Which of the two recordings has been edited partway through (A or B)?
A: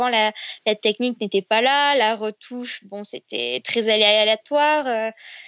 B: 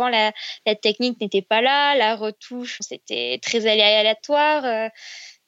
B